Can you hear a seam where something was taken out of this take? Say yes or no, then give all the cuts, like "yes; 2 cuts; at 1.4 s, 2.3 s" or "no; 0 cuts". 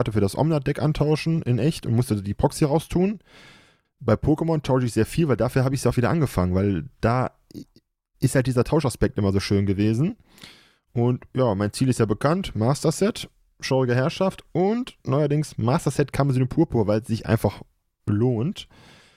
yes; 1 cut; at 3.8 s